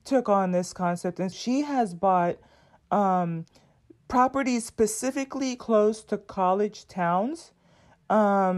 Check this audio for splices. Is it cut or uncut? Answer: cut